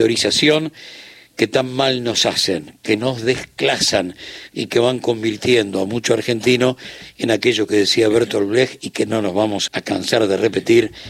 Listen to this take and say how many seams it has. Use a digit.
1